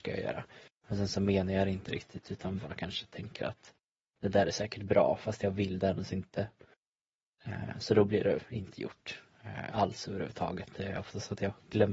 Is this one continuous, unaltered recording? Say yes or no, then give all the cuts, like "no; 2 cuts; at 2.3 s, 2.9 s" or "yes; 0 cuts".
yes; 0 cuts